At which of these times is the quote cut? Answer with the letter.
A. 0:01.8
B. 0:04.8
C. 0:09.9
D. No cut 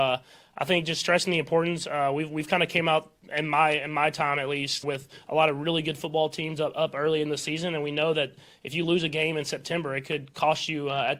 B